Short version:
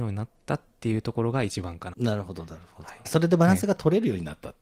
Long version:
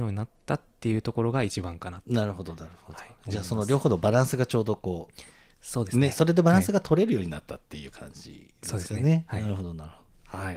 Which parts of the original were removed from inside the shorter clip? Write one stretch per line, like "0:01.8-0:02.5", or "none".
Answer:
0:01.9-0:02.0
0:03.1-0:06.1